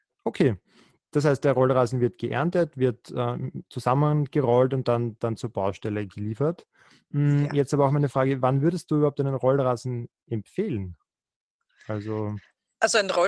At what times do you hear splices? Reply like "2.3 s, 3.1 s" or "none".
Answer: none